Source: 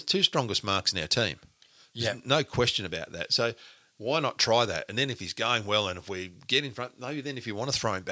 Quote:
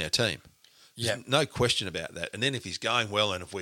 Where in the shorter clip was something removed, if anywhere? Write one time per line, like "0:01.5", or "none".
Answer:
0:02.3